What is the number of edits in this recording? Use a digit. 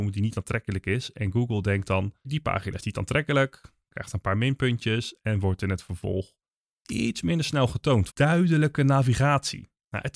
2